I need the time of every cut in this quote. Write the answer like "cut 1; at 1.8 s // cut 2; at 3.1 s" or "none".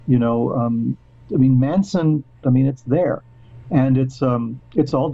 cut 1; at 2.4 s